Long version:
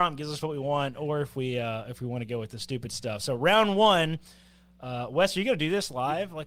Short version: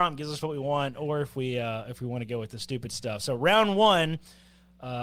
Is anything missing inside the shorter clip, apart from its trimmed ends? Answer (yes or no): no